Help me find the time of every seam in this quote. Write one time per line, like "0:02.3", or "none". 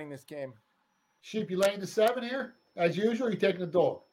none